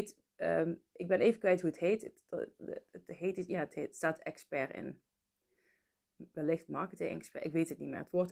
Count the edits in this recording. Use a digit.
0